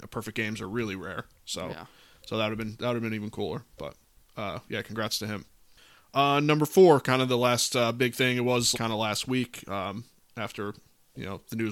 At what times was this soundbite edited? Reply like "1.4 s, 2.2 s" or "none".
8.7 s